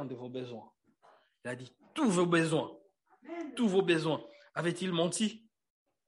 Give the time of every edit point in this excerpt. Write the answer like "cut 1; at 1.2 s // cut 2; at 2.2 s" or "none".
none